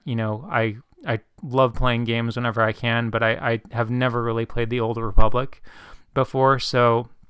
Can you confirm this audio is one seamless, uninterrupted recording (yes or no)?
yes